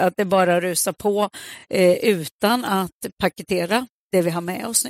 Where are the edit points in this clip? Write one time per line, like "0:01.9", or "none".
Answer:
none